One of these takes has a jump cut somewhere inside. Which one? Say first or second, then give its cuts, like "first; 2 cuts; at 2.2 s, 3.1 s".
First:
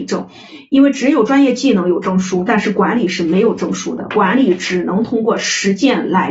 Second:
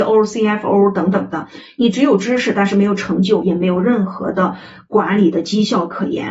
second; 1 cut; at 3.4 s